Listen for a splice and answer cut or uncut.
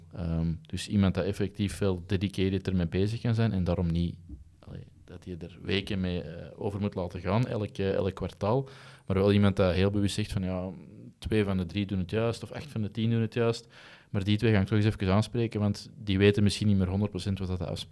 uncut